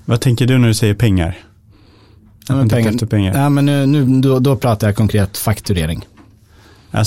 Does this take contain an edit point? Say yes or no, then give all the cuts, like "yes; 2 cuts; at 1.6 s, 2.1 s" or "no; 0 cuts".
no; 0 cuts